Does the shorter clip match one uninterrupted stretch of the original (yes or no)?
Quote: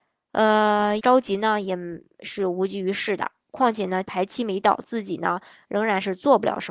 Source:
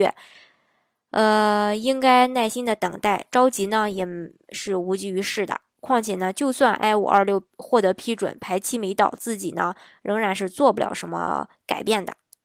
no